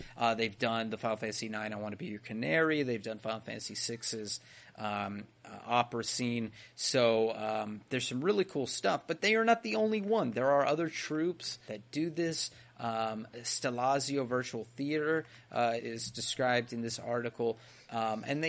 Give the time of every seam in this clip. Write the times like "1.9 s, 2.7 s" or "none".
11.6 s, 15.8 s